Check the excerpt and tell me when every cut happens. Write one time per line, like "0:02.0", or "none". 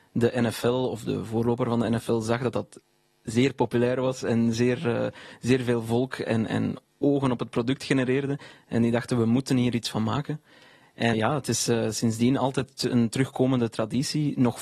0:11.1